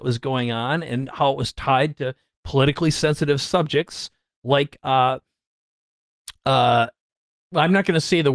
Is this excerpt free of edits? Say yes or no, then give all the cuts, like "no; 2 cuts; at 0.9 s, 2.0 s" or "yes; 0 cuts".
yes; 0 cuts